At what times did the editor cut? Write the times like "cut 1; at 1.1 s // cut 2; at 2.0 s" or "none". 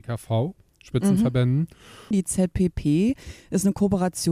cut 1; at 2.1 s